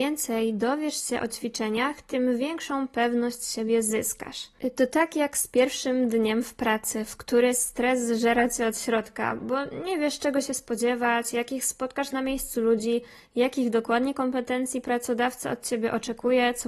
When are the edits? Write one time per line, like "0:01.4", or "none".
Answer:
none